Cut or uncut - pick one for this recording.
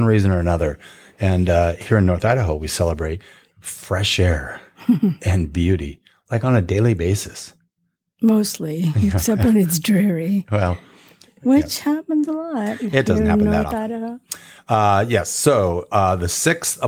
uncut